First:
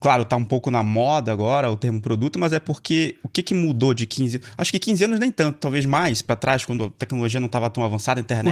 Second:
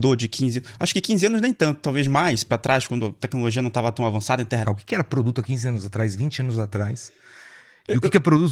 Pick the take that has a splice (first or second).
second